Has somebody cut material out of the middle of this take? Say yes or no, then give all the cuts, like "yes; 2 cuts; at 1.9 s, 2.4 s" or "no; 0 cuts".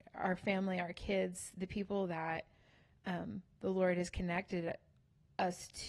no; 0 cuts